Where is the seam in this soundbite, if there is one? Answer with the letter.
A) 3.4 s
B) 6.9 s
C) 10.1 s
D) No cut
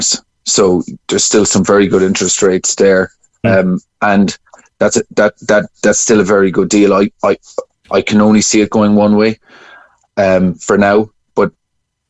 A